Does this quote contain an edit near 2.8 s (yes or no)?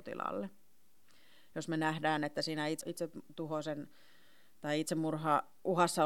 yes